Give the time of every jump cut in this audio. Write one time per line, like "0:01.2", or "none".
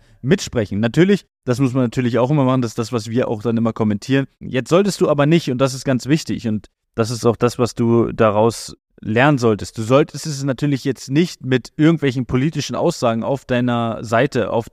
0:04.4